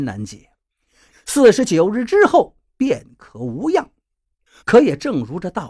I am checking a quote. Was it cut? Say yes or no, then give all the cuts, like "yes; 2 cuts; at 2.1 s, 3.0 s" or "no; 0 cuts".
yes; 2 cuts; at 1.1 s, 4.6 s